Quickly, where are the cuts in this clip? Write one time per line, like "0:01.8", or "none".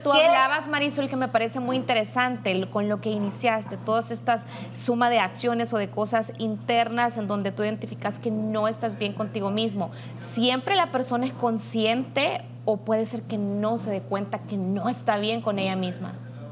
none